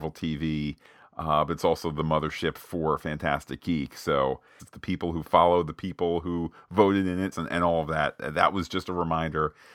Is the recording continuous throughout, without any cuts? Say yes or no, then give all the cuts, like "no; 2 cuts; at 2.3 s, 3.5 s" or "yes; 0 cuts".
no; 2 cuts; at 4.6 s, 7.3 s